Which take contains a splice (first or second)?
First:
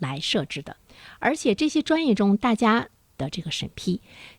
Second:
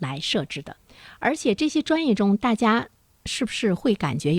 first